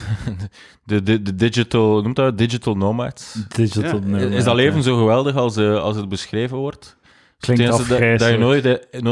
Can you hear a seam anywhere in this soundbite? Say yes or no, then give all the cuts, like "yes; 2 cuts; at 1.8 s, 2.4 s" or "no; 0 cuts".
no; 0 cuts